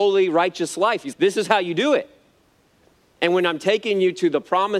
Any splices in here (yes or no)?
yes